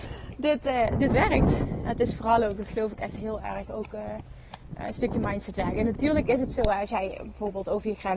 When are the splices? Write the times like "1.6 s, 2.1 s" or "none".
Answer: none